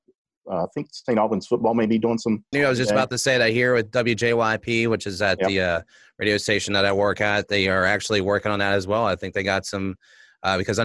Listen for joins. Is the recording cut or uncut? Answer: cut